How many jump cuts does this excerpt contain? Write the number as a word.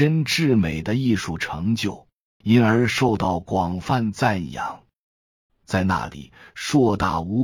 two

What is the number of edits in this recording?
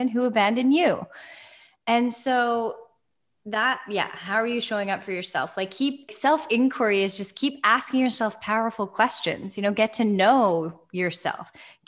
one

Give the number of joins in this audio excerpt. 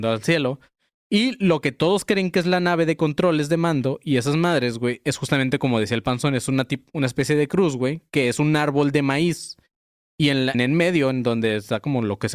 one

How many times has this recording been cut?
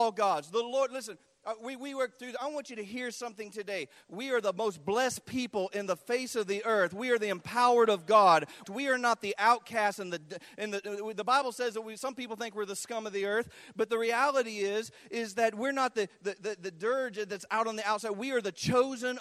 two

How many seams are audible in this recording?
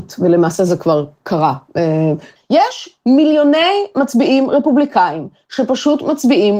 one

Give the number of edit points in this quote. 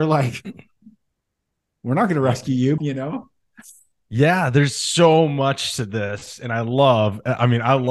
one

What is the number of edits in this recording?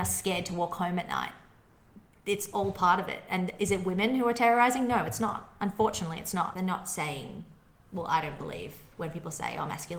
one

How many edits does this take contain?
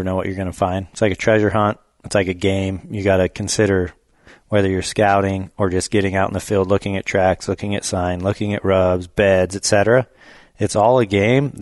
zero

